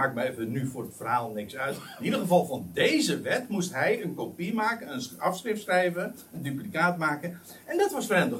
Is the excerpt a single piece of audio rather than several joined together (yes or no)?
yes